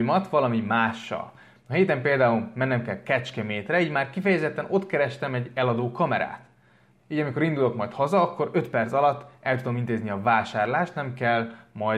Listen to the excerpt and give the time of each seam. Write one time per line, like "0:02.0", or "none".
0:07.0